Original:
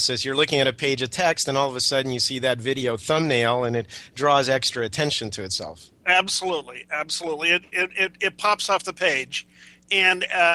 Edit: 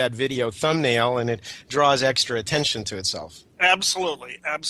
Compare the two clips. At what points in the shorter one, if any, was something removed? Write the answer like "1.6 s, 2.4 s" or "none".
none

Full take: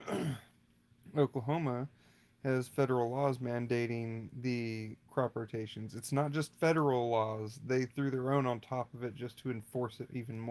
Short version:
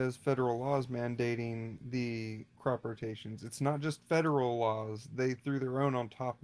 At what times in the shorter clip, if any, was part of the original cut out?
none

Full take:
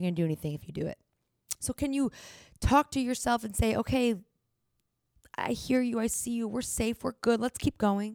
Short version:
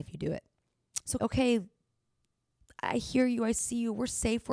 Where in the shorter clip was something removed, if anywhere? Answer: 1.2 s

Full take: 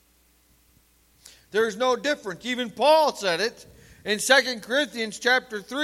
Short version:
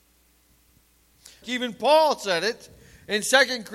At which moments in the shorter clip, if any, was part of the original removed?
1.4 s

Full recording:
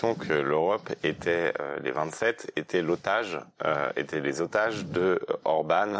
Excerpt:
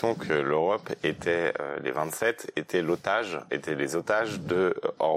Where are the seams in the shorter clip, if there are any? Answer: 3.5 s

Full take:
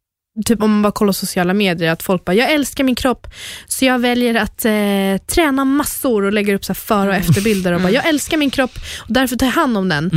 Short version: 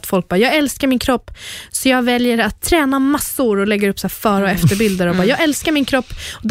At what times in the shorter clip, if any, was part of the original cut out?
2.6 s

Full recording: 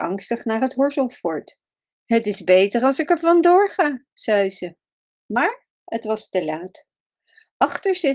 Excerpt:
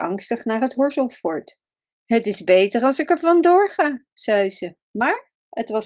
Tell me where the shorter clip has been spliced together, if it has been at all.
4.8 s

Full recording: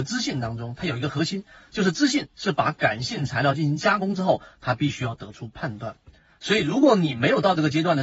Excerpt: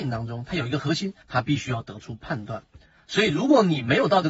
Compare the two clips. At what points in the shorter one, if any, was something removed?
1.2 s

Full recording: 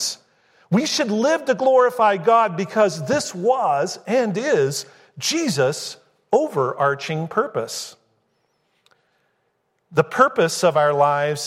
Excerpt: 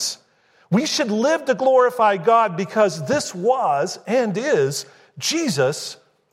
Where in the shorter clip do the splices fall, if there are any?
none

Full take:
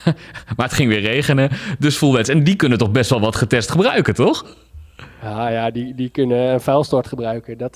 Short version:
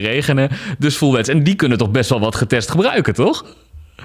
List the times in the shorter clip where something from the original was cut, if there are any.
none

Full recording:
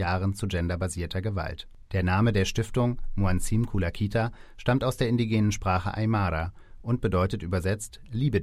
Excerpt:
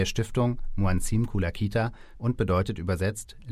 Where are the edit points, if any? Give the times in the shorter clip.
2.1 s

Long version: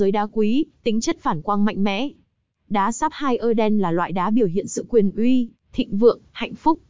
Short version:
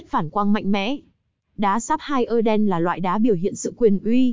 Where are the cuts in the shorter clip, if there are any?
none

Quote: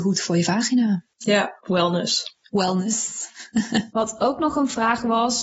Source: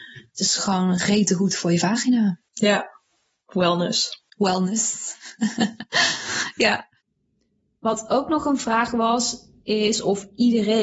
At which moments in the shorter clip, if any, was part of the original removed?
1.6 s, 3.9 s

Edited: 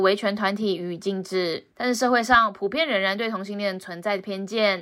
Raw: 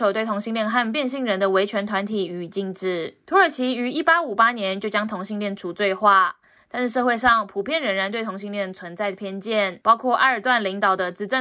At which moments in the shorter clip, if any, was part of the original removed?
1.7 s

